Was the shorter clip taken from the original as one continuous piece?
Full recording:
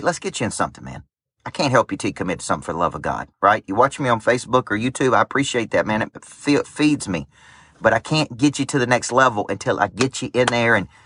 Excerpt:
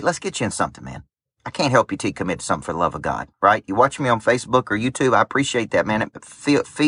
yes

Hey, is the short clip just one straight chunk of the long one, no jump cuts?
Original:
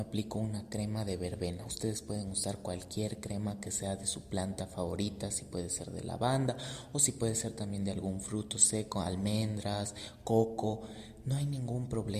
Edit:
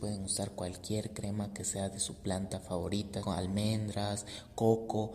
no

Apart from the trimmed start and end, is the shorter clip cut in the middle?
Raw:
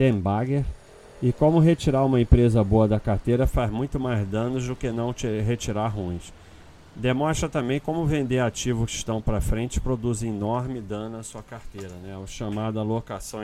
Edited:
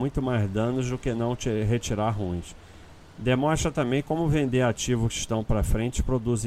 no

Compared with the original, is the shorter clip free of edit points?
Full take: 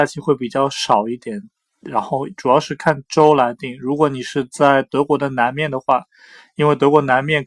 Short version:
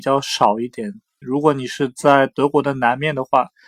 no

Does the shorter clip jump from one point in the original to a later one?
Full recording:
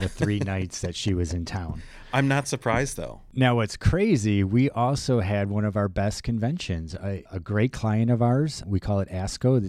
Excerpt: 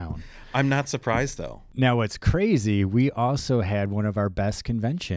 no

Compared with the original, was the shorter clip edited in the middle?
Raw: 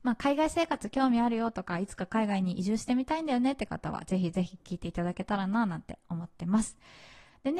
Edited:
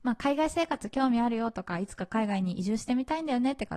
no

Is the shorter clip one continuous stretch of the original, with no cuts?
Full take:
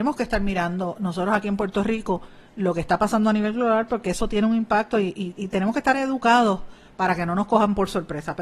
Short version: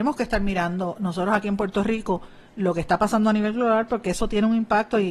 yes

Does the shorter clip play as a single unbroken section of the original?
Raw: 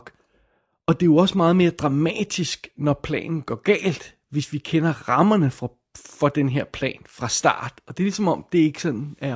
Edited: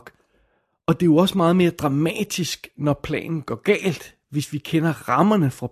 yes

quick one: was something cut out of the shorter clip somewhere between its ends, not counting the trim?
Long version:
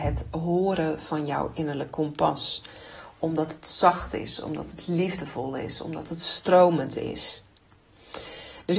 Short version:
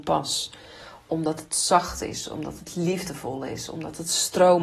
no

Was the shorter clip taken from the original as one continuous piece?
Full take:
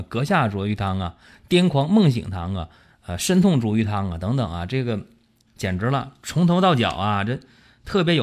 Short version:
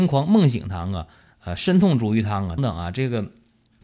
no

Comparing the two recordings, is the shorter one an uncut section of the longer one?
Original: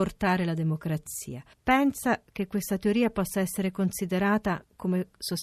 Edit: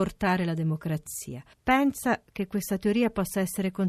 yes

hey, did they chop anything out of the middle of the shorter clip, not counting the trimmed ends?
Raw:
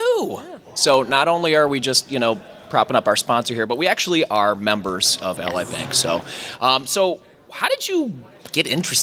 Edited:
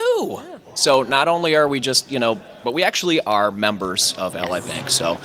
yes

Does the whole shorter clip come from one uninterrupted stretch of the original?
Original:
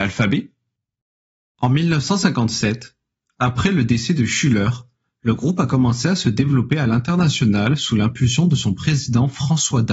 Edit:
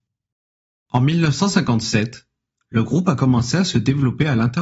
no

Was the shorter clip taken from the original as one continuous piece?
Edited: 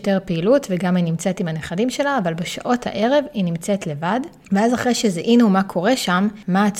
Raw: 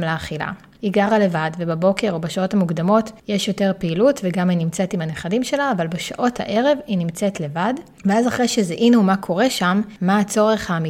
yes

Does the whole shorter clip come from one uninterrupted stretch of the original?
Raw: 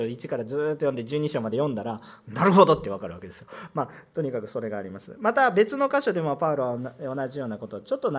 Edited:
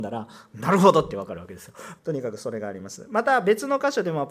no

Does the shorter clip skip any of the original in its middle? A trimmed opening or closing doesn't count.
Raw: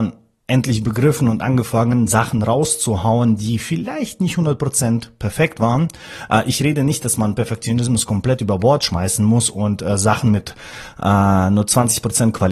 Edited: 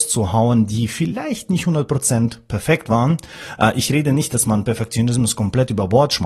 no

